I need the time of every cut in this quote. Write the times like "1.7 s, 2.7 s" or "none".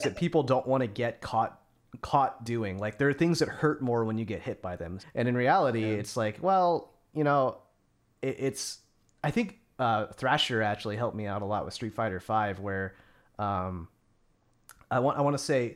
5.0 s